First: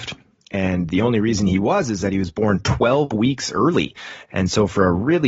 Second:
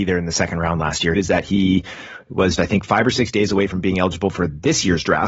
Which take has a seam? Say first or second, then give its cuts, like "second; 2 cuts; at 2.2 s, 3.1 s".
second; 2 cuts; at 1.2 s, 2.6 s